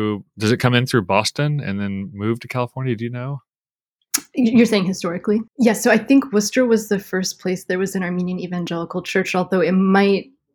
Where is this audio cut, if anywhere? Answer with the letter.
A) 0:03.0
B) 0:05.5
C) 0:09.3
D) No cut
B